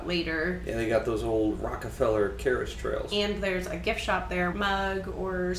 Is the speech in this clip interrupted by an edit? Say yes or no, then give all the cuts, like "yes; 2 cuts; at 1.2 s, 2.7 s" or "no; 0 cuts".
yes; 1 cut; at 4.5 s